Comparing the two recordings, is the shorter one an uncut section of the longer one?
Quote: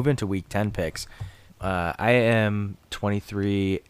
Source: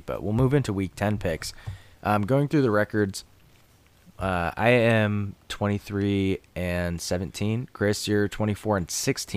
no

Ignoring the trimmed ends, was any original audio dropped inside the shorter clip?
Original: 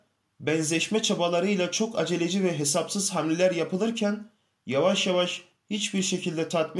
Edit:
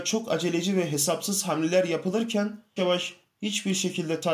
yes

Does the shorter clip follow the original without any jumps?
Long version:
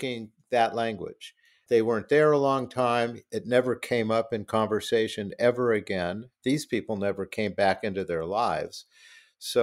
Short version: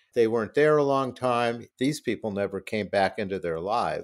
no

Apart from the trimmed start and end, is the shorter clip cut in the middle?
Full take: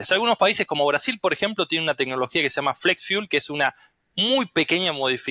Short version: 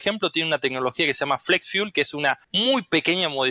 yes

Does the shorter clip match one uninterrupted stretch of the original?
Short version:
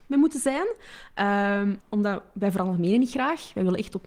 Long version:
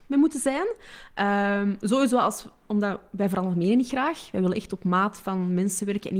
no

